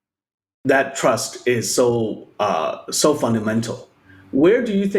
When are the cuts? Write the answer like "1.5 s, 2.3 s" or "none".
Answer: none